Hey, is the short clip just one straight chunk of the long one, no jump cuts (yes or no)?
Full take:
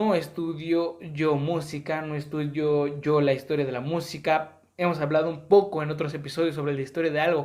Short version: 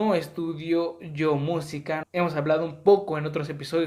no